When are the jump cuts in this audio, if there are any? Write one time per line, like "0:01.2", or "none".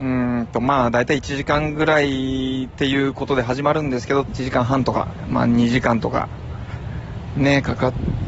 0:04.2